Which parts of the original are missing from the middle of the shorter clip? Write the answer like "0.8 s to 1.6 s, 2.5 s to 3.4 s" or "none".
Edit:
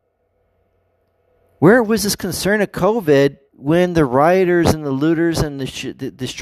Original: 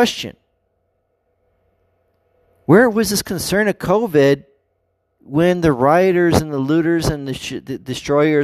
4.5 s to 5.1 s